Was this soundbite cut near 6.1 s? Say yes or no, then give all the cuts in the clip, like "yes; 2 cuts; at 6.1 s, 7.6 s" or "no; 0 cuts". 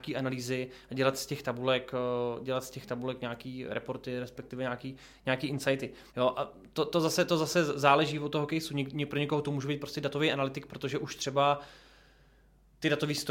yes; 1 cut; at 6.1 s